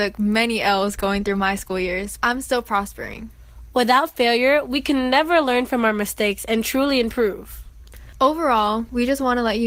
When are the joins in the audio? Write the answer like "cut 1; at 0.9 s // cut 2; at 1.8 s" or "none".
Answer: cut 1; at 2.2 s